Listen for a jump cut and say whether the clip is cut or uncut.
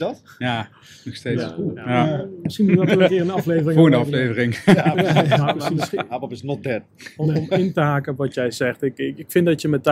uncut